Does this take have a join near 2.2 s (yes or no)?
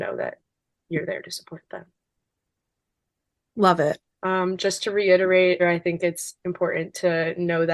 no